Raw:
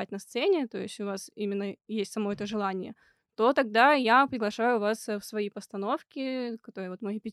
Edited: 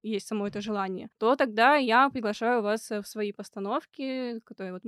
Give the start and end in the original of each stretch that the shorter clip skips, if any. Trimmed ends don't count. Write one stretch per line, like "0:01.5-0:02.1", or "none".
0:03.0-0:03.3